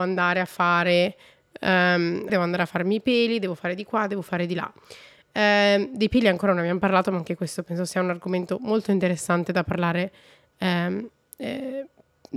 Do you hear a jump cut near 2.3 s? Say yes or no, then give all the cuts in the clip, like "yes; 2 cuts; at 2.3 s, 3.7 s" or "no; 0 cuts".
yes; 1 cut; at 2.3 s